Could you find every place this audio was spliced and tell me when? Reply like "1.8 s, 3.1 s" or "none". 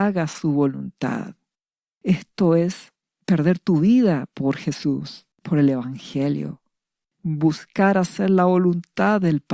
1.9 s, 5.3 s, 7.0 s